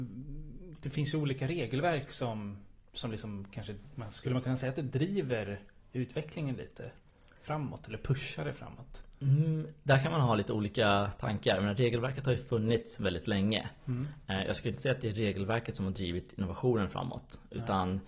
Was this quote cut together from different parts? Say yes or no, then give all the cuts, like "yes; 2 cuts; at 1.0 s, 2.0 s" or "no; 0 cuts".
no; 0 cuts